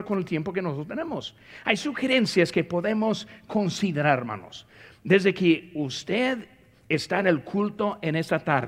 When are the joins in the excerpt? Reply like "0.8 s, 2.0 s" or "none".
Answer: none